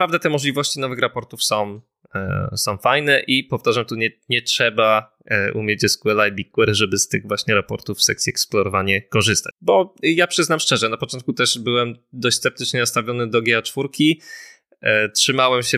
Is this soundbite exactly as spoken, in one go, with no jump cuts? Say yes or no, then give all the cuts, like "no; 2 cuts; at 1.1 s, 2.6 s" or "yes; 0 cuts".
no; 1 cut; at 9.5 s